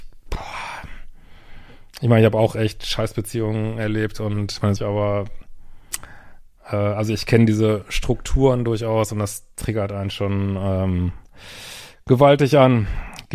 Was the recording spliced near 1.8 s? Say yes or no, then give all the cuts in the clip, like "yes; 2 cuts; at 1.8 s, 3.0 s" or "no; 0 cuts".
no; 1 cut; at 4.8 s